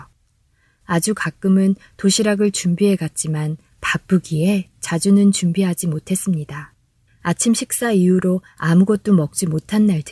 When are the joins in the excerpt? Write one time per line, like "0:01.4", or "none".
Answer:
0:07.1